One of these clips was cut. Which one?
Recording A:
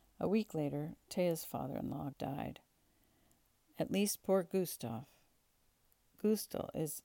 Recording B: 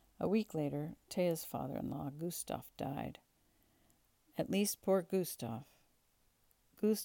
A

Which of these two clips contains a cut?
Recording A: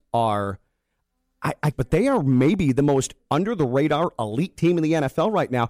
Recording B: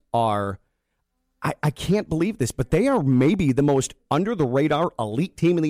A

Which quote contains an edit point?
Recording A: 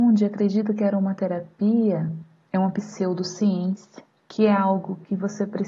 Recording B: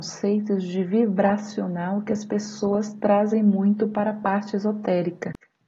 A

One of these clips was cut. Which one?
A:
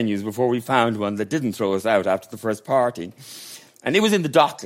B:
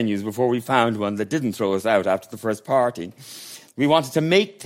B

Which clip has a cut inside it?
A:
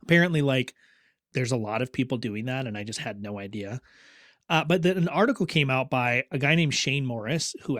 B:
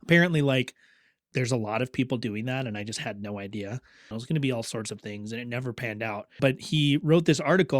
B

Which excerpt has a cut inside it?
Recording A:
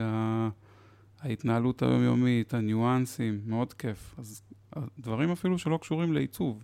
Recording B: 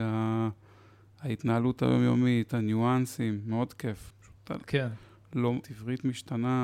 B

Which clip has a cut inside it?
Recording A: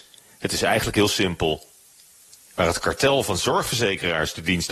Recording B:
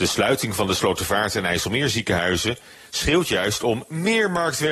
A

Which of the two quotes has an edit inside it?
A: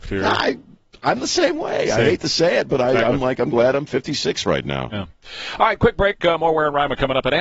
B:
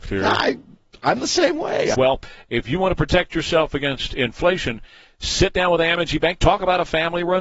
B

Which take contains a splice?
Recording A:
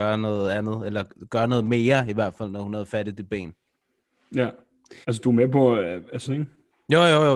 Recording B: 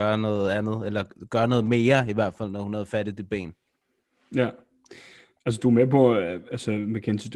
A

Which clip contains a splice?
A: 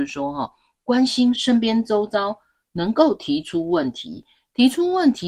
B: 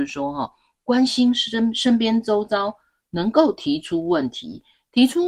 A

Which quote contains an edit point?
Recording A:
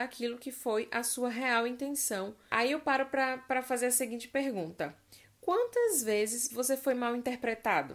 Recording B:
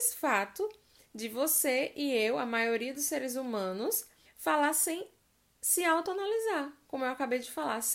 B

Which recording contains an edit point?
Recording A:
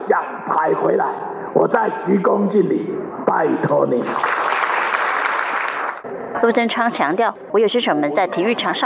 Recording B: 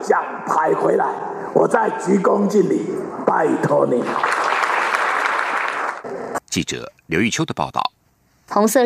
B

